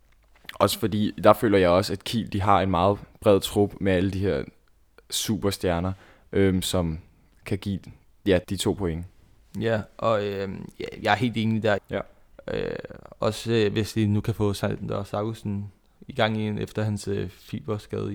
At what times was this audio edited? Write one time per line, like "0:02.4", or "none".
0:08.4
0:11.8